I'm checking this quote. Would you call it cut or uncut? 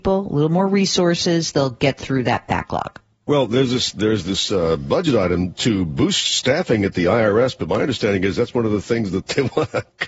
uncut